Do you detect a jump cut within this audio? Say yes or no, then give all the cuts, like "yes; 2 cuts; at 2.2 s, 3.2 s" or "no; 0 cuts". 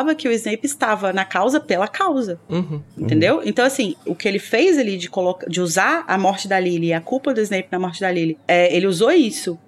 yes; 1 cut; at 6.1 s